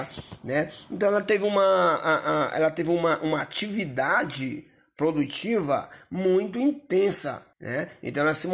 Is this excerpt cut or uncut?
cut